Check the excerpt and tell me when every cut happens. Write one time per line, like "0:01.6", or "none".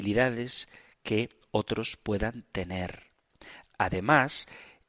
0:03.7